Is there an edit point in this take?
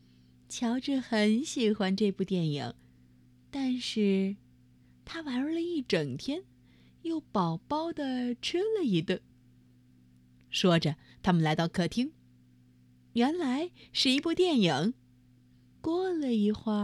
yes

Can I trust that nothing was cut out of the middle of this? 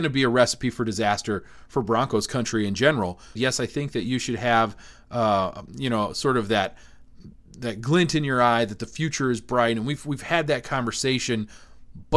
no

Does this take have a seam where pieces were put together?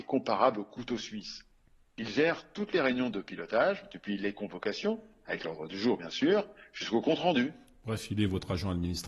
no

